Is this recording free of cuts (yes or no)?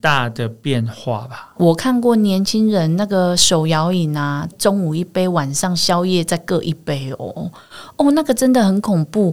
no